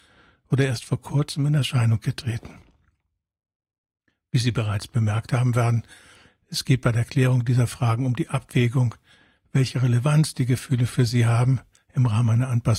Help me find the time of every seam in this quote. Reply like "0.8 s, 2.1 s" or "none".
none